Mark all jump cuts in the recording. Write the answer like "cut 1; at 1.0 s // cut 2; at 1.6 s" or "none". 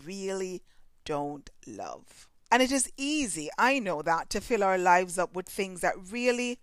cut 1; at 2.5 s